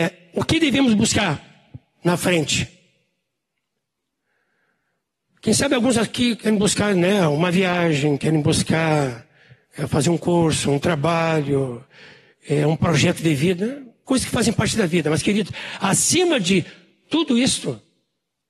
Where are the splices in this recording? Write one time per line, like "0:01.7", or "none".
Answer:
0:14.1